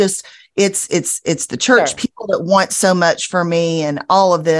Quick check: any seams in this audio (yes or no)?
yes